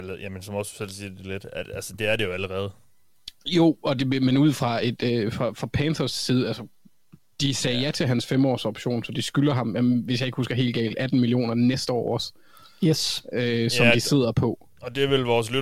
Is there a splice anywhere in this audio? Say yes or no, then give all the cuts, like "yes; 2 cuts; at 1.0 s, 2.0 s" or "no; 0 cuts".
no; 0 cuts